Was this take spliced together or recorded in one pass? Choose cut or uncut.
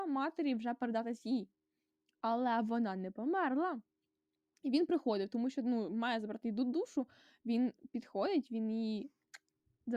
uncut